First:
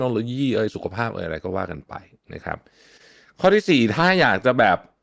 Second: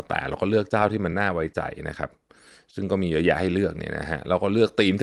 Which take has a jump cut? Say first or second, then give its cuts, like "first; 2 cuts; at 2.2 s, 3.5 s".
second; 1 cut; at 1.1 s